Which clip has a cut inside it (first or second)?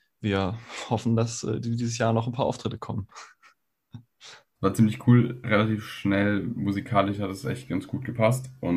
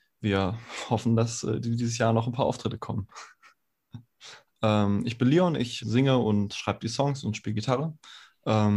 second